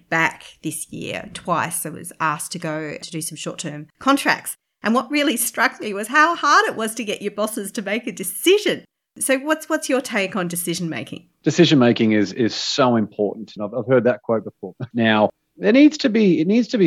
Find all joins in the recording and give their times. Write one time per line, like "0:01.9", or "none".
0:13.6
0:14.9